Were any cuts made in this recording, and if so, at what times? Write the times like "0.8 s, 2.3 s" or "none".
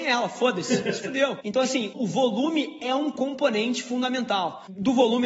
none